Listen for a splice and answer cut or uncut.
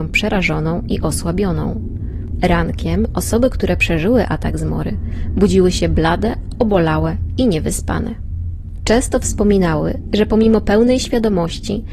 uncut